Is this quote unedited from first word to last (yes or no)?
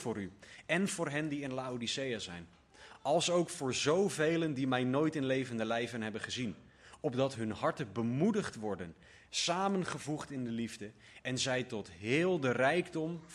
yes